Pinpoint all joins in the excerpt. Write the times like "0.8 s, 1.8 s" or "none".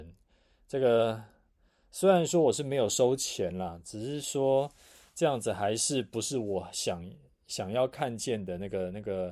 none